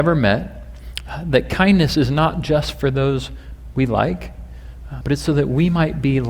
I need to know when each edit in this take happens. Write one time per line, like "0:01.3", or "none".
0:05.0